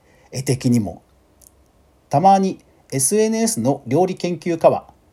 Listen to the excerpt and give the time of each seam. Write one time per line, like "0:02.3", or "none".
0:02.0